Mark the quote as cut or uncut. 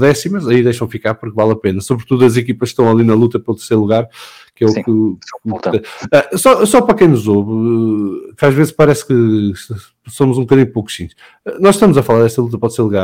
uncut